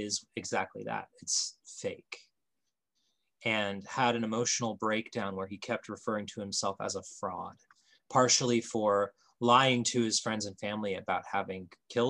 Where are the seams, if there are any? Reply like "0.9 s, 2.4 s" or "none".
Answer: none